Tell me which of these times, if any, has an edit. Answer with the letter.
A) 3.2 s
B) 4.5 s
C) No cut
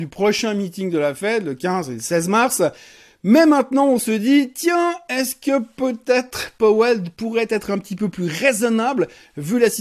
C